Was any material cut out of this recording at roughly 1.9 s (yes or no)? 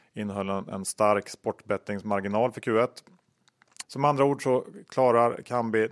no